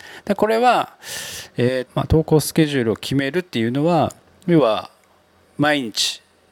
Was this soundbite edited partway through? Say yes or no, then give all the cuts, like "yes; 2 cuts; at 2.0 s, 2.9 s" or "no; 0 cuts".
yes; 1 cut; at 1.9 s